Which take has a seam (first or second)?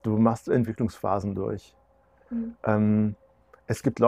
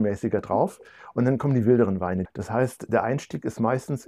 second